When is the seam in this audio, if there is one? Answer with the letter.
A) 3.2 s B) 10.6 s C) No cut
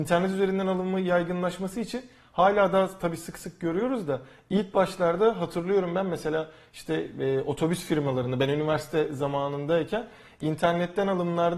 C